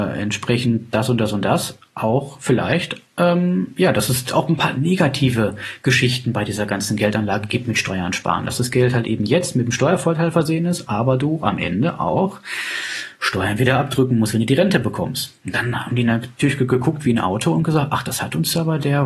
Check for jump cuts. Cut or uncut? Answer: uncut